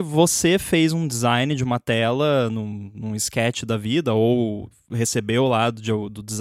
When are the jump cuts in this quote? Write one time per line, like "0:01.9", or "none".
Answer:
none

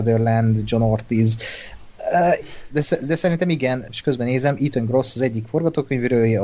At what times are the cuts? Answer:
0:02.4
0:03.9

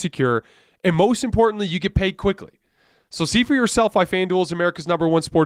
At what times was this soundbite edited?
none

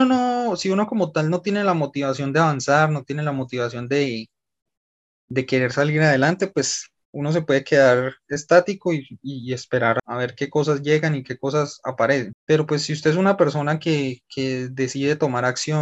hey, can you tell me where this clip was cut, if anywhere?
none

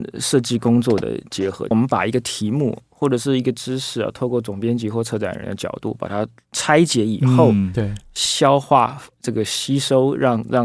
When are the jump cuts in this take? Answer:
0:01.7

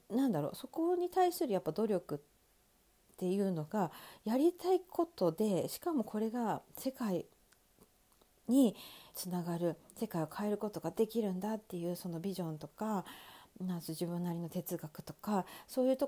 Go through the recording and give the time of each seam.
0:09.1

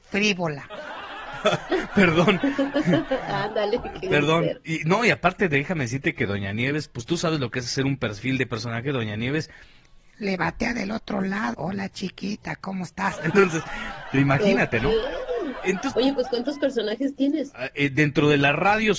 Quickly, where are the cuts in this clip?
0:11.5

